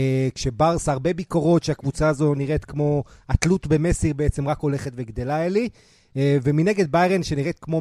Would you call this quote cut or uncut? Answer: uncut